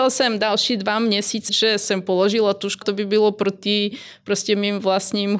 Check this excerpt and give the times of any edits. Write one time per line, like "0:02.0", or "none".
0:01.5
0:02.8